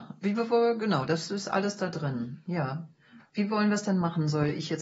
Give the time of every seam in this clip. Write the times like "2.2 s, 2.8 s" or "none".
none